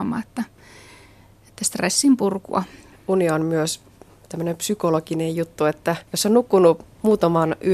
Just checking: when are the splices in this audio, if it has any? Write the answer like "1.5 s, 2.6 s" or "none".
2.9 s, 6.1 s